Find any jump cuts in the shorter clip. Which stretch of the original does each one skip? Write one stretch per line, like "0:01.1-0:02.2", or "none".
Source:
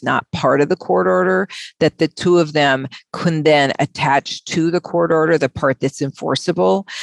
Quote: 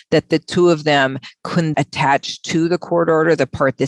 0:03.4-0:03.8